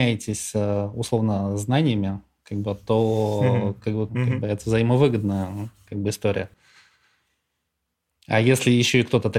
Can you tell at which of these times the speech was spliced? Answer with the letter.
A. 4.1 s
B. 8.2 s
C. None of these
A